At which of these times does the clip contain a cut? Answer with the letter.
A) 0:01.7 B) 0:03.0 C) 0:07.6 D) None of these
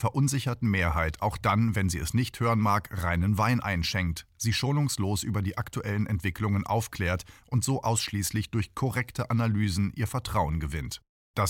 D